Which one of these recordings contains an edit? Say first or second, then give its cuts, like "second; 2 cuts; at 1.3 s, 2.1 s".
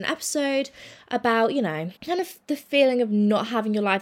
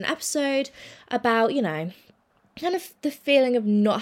first; 1 cut; at 2.0 s